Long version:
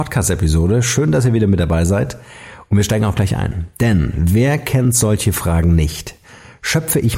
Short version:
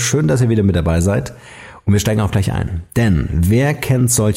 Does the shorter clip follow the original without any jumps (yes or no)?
yes